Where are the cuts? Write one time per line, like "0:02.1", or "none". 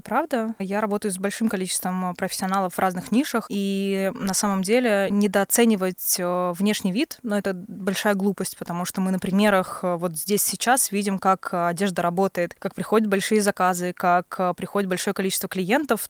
0:03.5